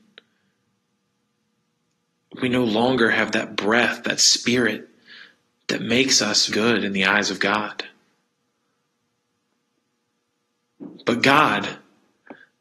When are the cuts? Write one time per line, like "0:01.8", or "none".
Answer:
0:06.5